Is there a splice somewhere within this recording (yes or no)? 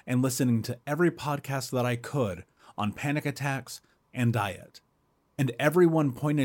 yes